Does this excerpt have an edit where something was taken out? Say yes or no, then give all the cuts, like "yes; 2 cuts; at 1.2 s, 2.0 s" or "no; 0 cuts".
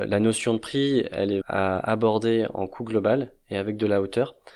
yes; 1 cut; at 1.4 s